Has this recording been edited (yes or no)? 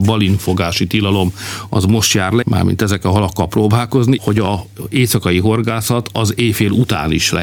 yes